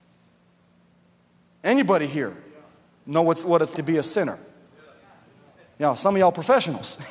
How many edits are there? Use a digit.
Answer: 1